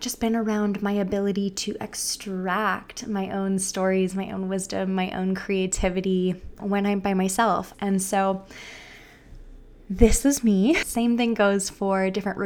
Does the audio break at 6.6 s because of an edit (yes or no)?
yes